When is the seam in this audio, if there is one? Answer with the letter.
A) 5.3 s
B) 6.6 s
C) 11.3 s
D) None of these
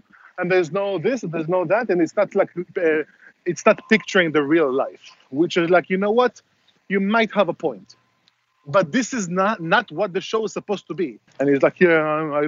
C